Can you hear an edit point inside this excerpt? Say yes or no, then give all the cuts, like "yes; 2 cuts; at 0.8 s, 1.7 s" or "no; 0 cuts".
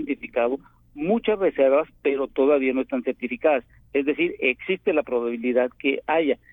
no; 0 cuts